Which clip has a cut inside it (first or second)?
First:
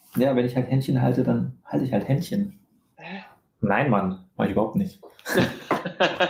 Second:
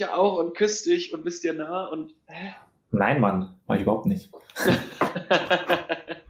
first